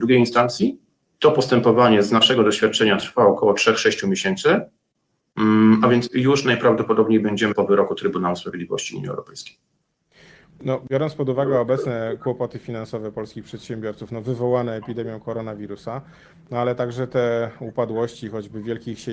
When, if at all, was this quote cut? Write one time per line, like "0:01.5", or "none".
0:07.5